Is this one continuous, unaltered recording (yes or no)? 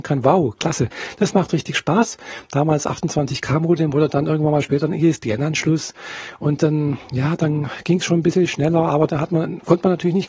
no